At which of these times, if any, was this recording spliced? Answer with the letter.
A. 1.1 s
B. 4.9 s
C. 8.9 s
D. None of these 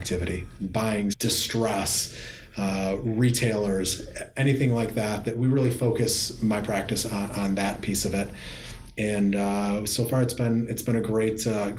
A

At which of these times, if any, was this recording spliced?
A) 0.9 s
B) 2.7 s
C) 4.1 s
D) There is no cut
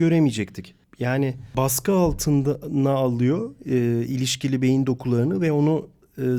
D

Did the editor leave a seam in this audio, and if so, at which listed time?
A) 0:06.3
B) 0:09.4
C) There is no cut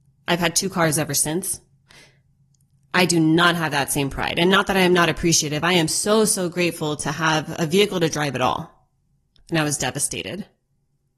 B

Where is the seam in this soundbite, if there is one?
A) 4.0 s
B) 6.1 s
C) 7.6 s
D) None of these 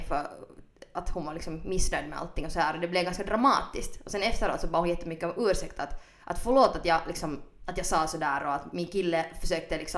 C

